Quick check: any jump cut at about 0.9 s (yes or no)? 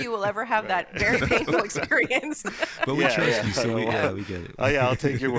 no